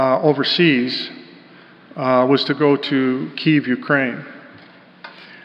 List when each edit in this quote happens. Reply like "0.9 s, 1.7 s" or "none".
none